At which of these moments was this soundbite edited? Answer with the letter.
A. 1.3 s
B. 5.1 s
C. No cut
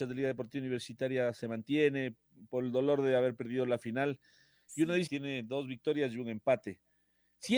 B